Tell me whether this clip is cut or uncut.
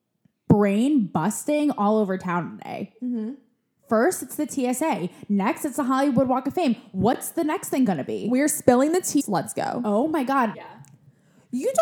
cut